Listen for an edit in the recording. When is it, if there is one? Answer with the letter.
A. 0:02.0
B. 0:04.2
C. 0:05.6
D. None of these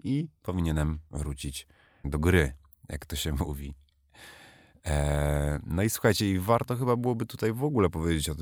A